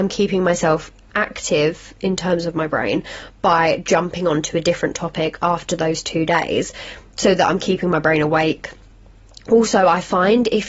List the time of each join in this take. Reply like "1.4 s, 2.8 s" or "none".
none